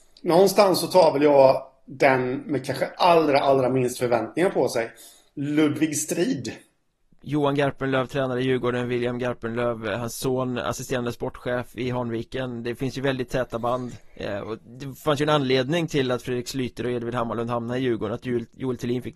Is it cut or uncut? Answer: cut